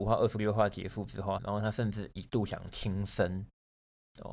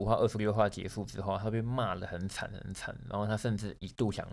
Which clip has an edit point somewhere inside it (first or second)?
first